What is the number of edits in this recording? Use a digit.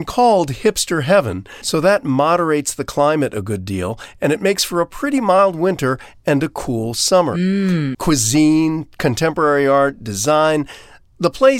2